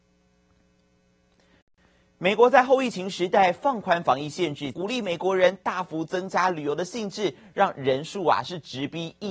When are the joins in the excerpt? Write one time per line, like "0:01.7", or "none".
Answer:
0:04.7

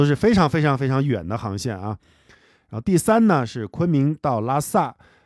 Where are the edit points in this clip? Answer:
none

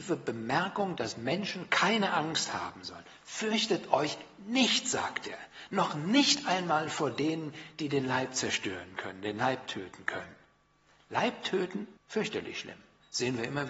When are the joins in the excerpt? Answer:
0:12.0

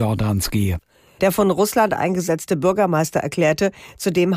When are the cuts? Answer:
0:01.2

